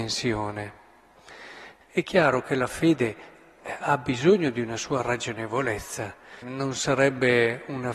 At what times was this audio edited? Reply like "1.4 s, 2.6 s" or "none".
1.8 s, 6.4 s

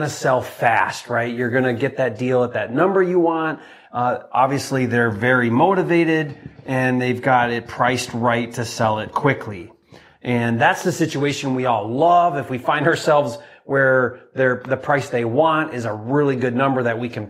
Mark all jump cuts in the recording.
none

